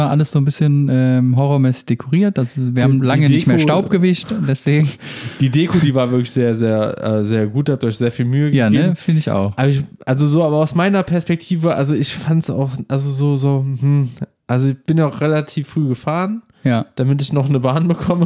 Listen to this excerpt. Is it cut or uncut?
uncut